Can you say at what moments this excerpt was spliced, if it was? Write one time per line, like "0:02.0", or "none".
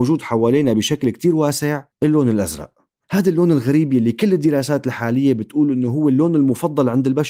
0:01.9